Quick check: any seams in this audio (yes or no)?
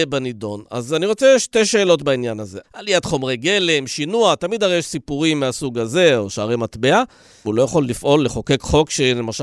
yes